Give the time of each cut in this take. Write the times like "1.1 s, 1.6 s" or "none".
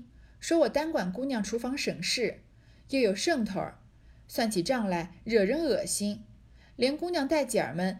none